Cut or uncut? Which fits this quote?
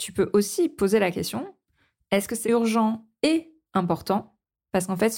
cut